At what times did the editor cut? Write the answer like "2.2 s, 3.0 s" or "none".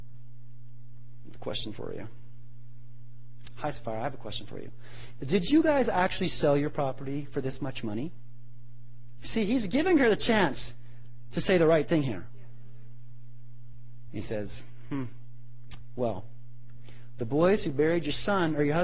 14.1 s